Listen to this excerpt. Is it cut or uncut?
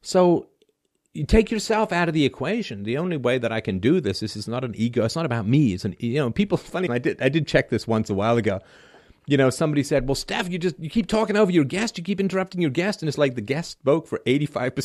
cut